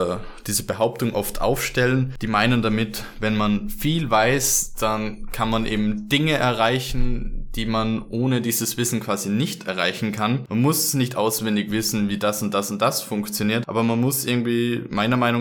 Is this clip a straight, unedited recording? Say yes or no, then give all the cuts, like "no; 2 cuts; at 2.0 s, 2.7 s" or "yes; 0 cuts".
no; 1 cut; at 10.5 s